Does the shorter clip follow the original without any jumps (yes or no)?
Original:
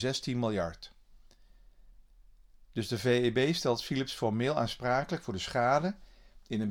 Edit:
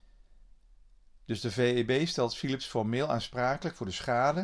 yes